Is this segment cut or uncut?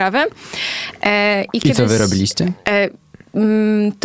uncut